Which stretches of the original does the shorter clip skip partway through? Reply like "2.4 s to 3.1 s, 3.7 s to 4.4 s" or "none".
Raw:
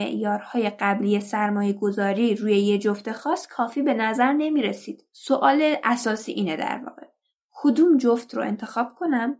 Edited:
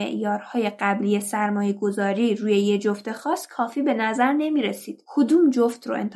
5.1 s to 7.5 s